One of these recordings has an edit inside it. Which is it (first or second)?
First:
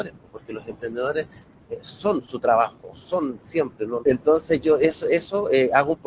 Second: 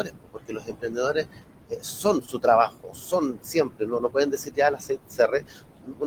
first